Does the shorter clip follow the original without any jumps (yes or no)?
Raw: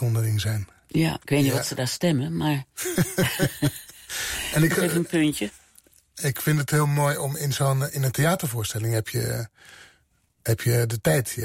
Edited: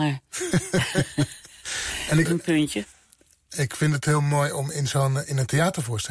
no